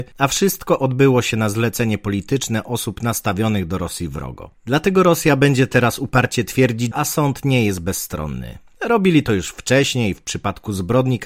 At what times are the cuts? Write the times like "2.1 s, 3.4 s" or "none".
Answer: 4.5 s, 6.9 s